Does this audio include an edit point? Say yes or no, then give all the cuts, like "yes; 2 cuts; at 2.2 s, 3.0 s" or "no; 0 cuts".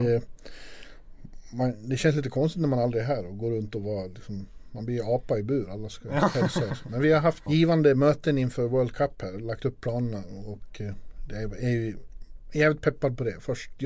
yes; 1 cut; at 7.5 s